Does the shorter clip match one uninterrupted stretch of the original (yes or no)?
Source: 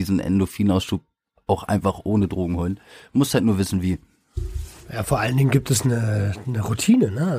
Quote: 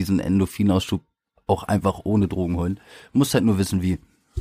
yes